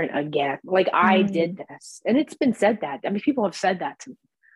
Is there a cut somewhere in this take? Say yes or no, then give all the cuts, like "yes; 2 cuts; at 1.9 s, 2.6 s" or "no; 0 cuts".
no; 0 cuts